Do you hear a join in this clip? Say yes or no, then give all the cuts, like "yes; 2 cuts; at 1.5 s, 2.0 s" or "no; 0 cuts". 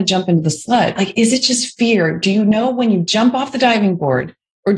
yes; 1 cut; at 1.0 s